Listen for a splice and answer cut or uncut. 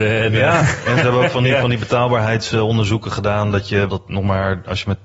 cut